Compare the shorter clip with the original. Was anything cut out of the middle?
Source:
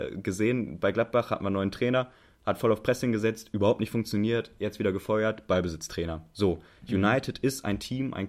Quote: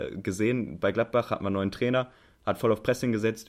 no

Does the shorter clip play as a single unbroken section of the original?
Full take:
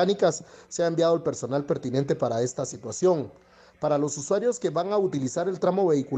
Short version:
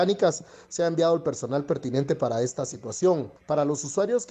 no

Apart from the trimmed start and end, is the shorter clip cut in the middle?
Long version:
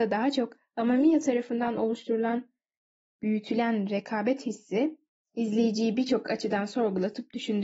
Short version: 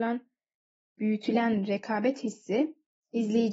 no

